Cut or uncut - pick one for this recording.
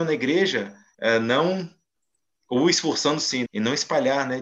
cut